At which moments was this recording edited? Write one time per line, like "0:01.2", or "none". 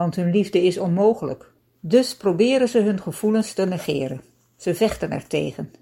0:01.6